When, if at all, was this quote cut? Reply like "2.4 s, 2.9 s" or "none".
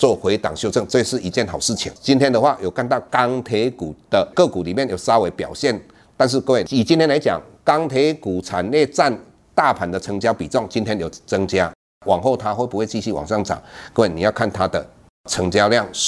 none